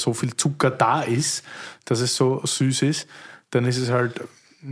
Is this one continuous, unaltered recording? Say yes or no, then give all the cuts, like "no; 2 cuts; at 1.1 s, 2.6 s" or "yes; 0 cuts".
yes; 0 cuts